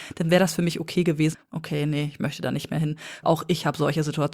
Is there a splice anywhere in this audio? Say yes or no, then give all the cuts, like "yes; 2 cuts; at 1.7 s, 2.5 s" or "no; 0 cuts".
yes; 2 cuts; at 1.3 s, 3.2 s